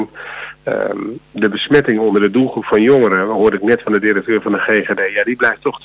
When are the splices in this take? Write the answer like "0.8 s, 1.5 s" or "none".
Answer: none